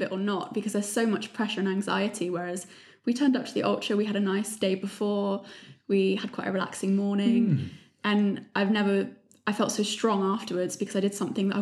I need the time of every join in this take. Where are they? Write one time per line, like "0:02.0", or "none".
none

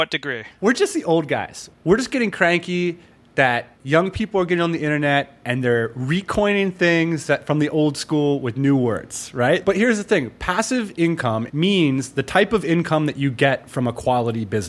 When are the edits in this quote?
0:09.6
0:11.5

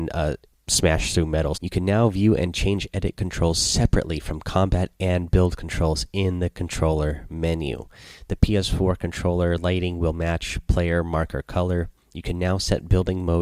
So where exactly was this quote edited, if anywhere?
0:01.5

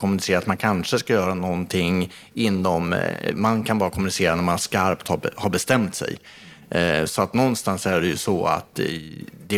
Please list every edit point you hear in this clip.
0:03.3

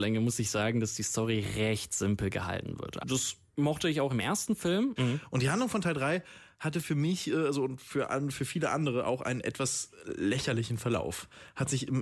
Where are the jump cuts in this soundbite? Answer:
0:03.0
0:05.0

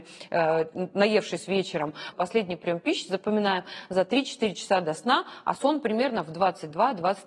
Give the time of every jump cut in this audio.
0:02.1

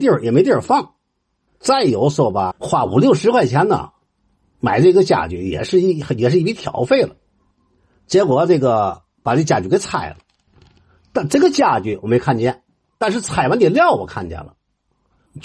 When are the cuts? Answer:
0:02.5

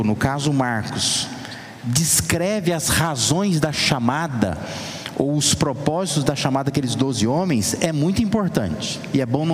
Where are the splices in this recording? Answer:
none

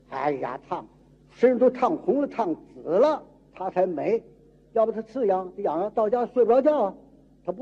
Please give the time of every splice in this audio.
none

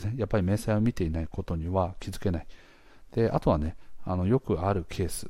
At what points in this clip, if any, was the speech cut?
none

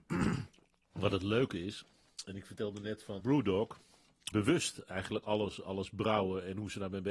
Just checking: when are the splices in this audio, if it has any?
0:03.2
0:04.3

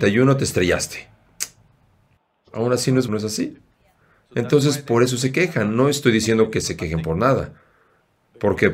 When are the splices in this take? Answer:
0:03.1

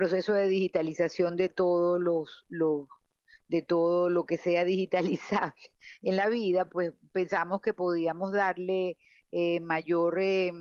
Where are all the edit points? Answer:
none

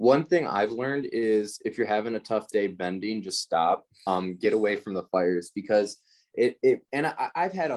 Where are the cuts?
0:04.1

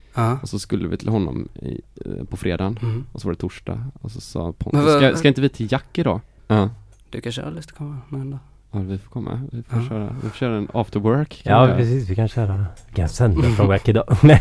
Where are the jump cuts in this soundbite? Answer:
0:06.4

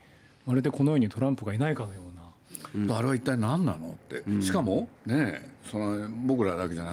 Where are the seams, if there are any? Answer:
0:02.9
0:05.0

